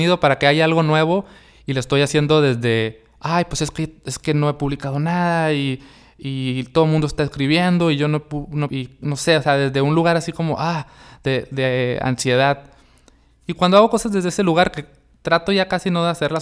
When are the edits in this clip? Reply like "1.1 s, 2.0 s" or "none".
8.7 s